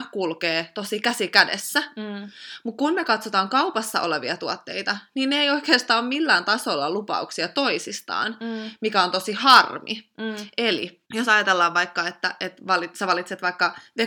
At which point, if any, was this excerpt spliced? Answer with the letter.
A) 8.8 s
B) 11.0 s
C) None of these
B